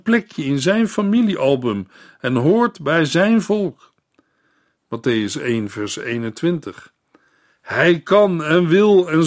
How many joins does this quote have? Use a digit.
1